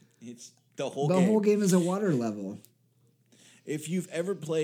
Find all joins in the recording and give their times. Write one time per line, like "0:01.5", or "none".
none